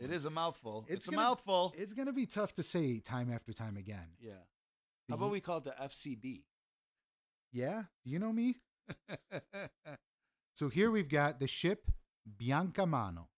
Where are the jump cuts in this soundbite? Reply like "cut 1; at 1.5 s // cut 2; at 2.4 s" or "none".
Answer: none

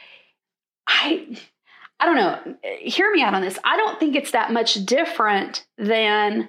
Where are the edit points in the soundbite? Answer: none

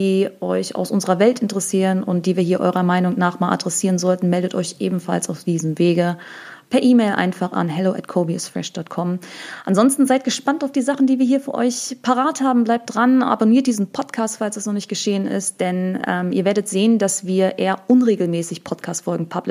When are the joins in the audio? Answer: none

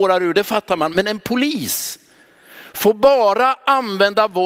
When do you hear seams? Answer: none

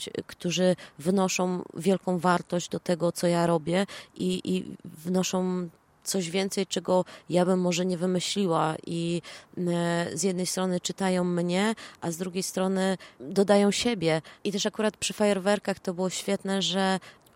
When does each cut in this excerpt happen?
cut 1; at 14.4 s

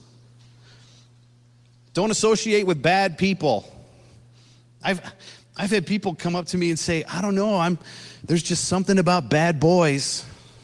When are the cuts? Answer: none

